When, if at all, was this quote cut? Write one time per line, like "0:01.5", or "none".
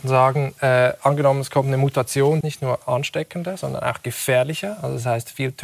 0:02.4